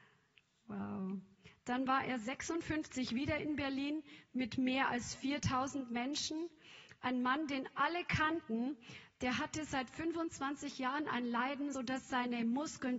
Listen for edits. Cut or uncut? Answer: cut